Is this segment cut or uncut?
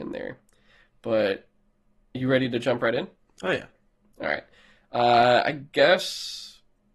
uncut